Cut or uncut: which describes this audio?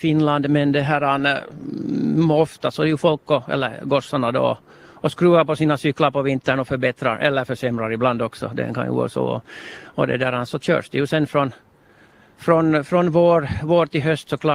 uncut